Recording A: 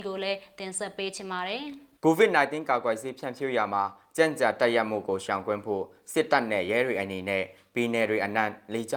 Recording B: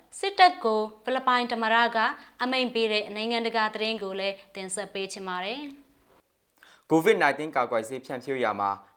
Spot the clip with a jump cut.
A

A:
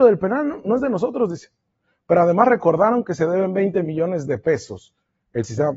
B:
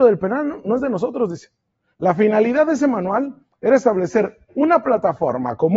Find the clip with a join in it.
B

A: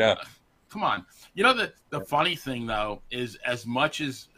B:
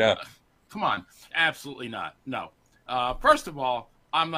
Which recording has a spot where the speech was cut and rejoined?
B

